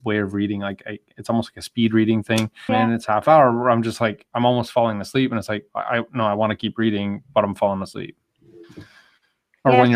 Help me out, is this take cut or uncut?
cut